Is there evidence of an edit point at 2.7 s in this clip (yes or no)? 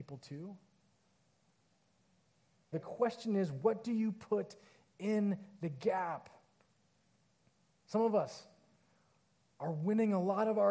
yes